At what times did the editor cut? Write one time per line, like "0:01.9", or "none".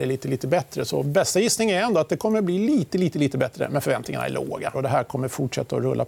0:04.7